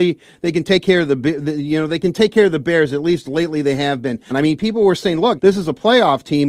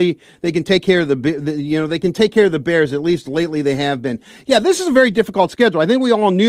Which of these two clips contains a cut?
first; 2 cuts; at 4.3 s, 5.4 s

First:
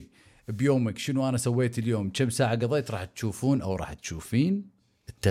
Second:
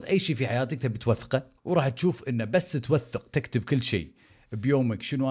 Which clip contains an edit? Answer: second; 1 cut; at 1.6 s

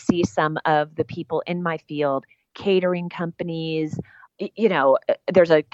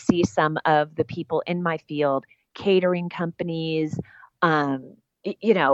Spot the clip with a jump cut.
first; 1 cut; at 4.3 s

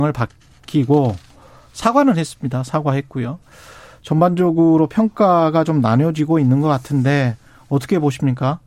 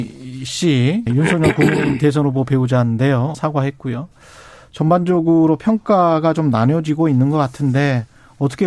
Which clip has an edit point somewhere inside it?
second; 2 cuts; at 1.1 s, 3.3 s

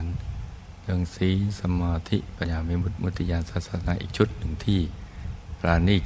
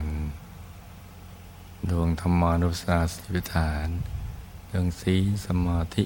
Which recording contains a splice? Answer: first; 1 cut; at 2.4 s

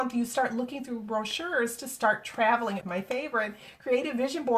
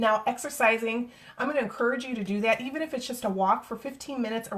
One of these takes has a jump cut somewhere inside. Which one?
first; 1 cut; at 2.8 s

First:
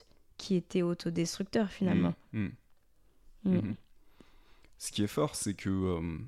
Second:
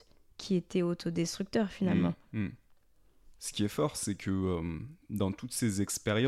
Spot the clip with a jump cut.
second; 1 cut; at 3.3 s

